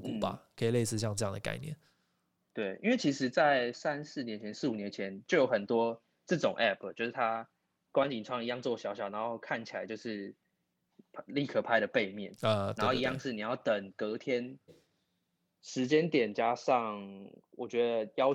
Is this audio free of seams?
no; 2 cuts; at 3.7 s, 14.7 s

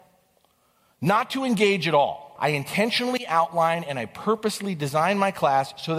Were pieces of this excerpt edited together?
yes; 1 cut; at 2.4 s

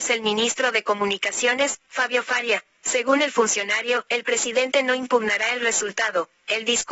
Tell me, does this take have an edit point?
no; 0 cuts

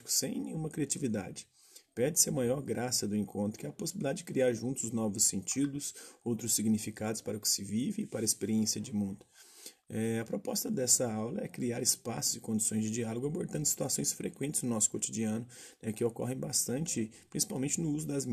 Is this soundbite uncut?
yes; 0 cuts

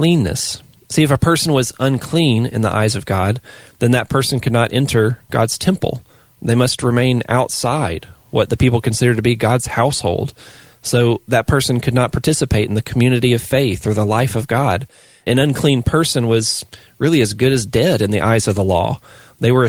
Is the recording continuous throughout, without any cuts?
yes; 0 cuts

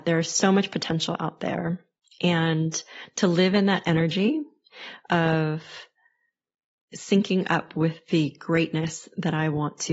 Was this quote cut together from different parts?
no; 0 cuts

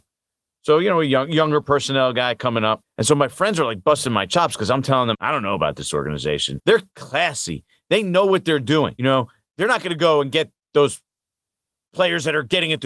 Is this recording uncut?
no; 3 cuts; at 2.8 s, 5.1 s, 6.6 s

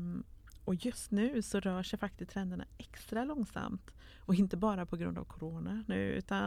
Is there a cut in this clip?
no; 0 cuts

